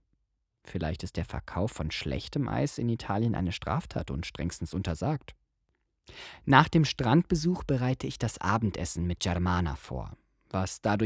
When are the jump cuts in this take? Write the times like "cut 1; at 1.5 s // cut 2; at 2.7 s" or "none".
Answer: none